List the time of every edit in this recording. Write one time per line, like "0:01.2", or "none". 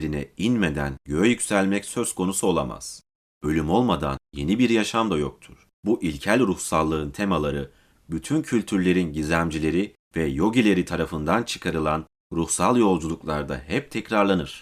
0:05.7